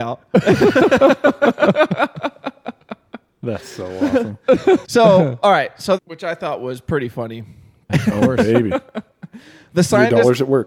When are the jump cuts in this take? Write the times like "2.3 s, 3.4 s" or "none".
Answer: 4.8 s, 6.0 s, 7.9 s